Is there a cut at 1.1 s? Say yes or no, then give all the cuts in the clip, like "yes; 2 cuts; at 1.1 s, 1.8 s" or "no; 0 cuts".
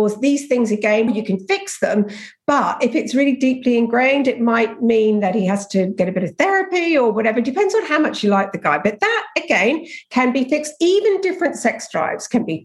yes; 1 cut; at 1.1 s